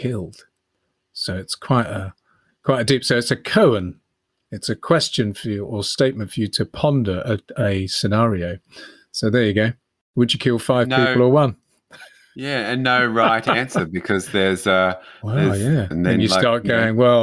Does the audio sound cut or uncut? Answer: cut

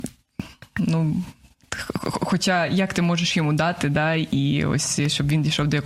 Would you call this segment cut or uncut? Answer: uncut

